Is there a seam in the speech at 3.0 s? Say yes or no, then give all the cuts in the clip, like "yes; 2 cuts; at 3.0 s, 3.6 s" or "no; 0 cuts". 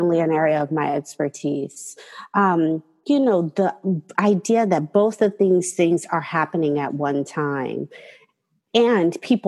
yes; 1 cut; at 3.0 s